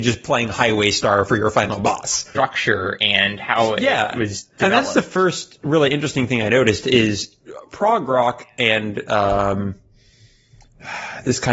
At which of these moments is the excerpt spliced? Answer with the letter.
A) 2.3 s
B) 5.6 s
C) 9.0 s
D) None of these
A